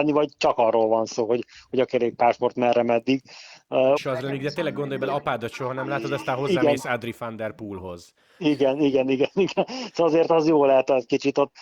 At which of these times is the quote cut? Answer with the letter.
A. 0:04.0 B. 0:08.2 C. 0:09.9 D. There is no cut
A